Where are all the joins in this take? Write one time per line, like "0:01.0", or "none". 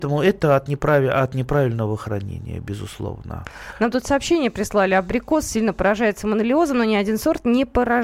none